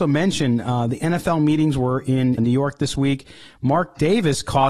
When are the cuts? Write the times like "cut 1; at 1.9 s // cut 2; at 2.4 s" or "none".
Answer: cut 1; at 2.4 s